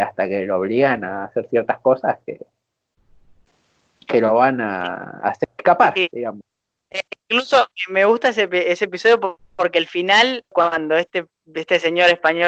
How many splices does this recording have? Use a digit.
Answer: 1